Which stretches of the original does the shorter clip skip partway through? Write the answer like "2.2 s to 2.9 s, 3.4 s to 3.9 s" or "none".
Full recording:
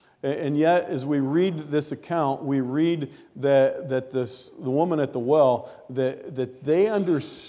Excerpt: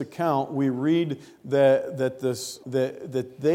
4.5 s to 5.9 s